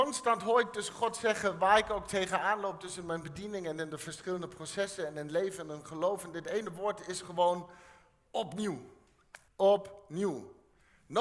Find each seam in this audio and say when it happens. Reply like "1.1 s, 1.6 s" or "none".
9.5 s